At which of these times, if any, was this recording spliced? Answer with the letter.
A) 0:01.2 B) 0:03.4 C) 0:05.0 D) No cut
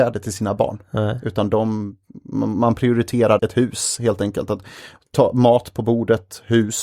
B